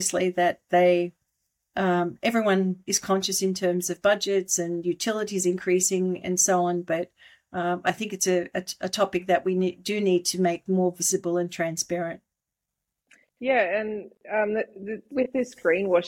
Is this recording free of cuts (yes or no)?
yes